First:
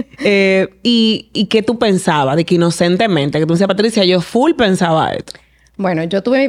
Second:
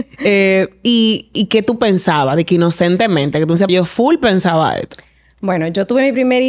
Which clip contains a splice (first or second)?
second